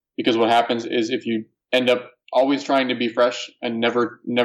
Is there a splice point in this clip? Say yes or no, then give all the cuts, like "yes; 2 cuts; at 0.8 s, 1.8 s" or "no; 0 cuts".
no; 0 cuts